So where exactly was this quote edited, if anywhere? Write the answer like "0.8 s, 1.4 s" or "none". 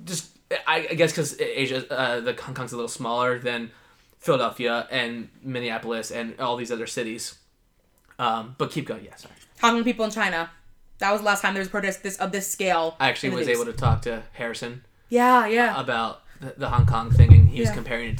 9.5 s